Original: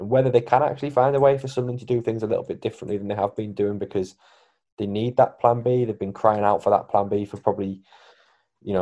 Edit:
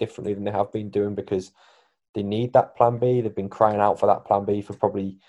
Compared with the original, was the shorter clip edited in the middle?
no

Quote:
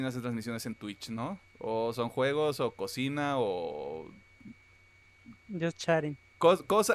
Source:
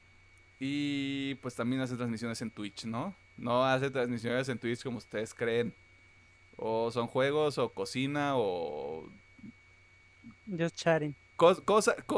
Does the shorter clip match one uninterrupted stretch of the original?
no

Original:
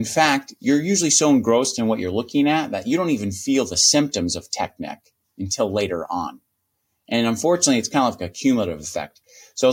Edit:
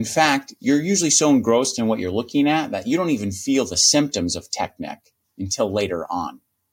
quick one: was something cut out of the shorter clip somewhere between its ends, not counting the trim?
no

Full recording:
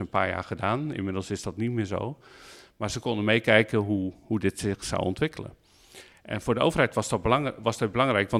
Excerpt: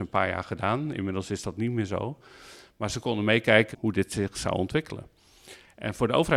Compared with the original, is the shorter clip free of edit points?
no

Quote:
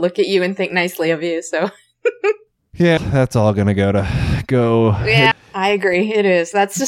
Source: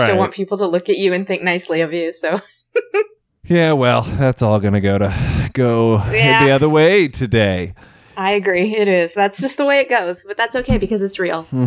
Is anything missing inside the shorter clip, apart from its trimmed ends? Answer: yes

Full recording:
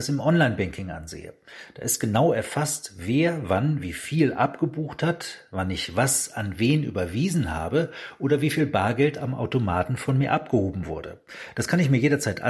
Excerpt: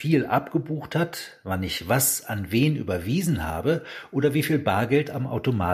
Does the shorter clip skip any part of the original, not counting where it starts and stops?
no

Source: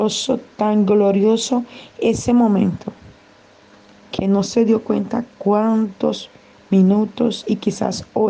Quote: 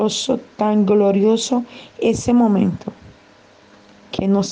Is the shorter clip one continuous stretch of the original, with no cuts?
yes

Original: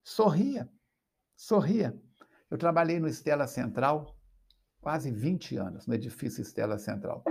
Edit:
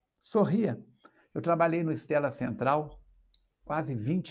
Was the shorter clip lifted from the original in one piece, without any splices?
yes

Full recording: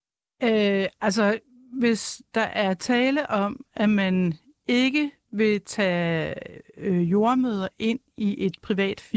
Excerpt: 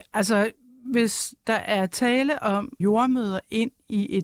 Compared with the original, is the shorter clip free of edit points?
no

